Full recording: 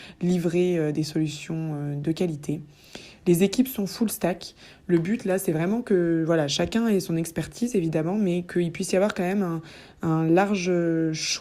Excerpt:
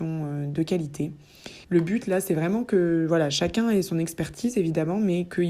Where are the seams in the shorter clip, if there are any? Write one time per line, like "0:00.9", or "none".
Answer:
0:01.6